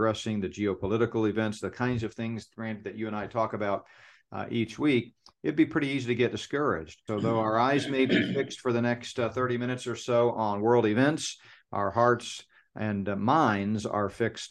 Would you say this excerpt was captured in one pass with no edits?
no; 1 cut; at 7.1 s

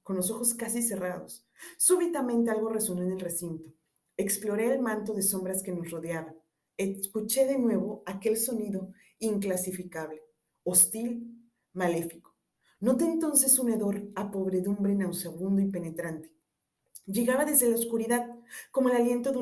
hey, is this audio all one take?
yes; 0 cuts

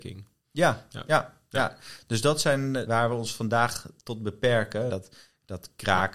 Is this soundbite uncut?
no; 2 cuts; at 2.9 s, 4.9 s

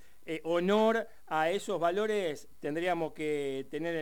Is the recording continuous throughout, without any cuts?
yes; 0 cuts

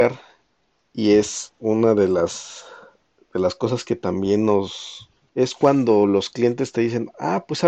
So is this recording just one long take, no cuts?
no; 1 cut; at 5.2 s

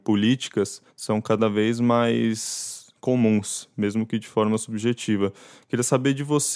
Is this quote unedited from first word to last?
no; 1 cut; at 0.9 s

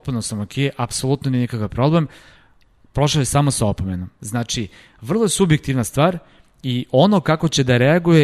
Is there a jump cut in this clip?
no; 0 cuts

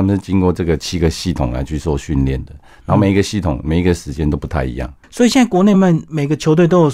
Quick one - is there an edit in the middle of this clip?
yes; 1 cut; at 5.7 s

